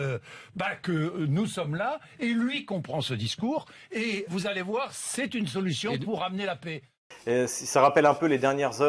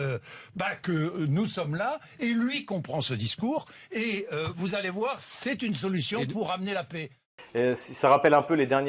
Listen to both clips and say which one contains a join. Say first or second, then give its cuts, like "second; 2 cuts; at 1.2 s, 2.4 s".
first; 1 cut; at 4.3 s